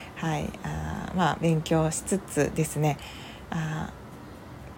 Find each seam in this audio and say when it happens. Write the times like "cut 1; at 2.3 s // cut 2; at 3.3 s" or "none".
none